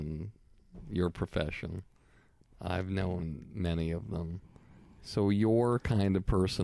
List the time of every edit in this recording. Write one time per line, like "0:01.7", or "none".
0:05.0